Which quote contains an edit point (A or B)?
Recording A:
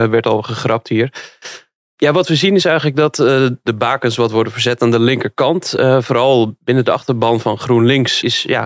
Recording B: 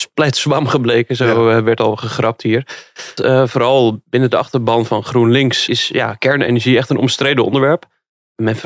B